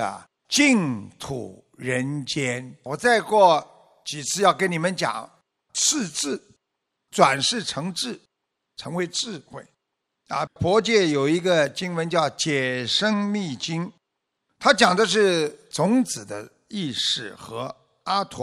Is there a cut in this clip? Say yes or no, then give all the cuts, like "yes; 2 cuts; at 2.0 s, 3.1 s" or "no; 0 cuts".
yes; 2 cuts; at 2.9 s, 10.5 s